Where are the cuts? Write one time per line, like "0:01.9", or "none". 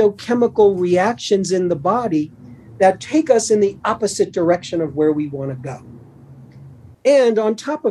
0:06.9